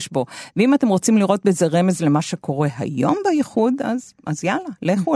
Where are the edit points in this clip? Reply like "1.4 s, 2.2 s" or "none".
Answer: none